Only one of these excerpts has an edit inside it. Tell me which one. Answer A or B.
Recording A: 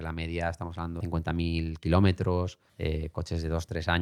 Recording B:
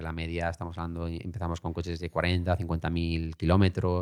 A